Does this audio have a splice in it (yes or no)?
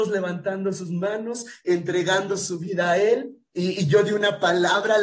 yes